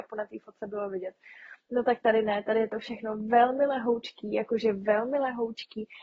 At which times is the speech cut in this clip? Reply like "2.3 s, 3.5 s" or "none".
none

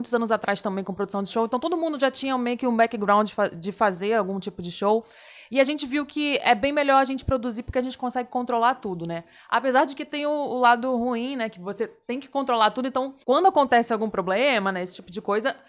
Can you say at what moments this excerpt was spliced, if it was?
13.2 s

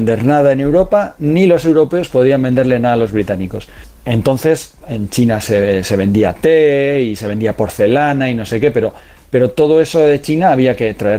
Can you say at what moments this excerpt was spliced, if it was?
4.8 s

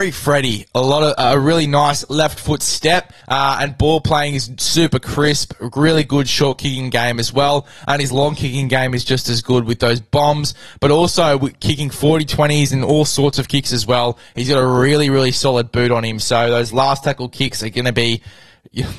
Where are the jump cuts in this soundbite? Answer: 3.2 s

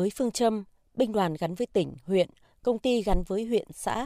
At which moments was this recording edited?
none

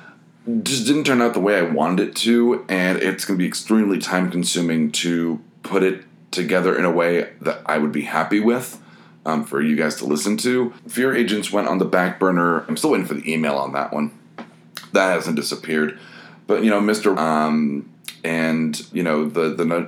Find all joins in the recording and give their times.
12.7 s, 17.1 s, 18.9 s

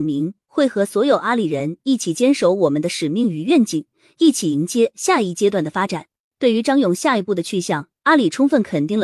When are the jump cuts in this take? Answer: none

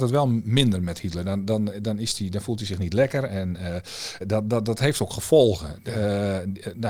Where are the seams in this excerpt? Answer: 4.2 s

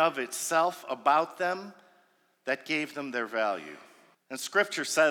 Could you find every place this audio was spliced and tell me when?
4.1 s

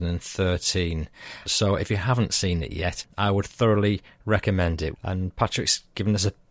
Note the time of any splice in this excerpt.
1.5 s, 4.9 s

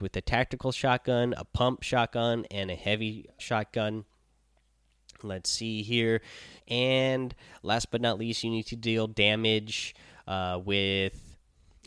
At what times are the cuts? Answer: 3.4 s, 6.6 s

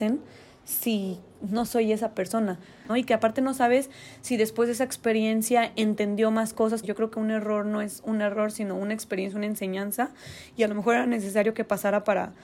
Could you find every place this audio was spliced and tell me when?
2.9 s, 6.8 s

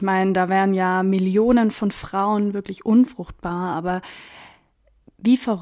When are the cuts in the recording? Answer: none

